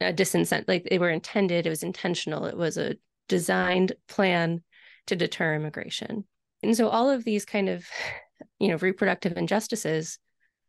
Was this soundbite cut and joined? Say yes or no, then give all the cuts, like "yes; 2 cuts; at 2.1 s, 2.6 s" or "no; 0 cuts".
yes; 2 cuts; at 6.6 s, 8.5 s